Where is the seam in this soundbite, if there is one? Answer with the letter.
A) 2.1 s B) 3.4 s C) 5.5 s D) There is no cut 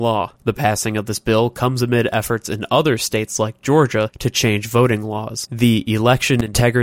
D